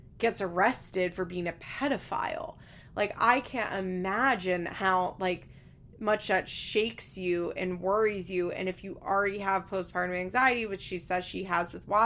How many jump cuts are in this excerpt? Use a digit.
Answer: 0